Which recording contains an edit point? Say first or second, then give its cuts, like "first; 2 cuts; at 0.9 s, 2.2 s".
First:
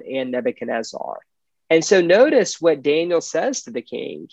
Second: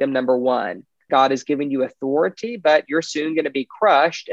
second; 1 cut; at 1.1 s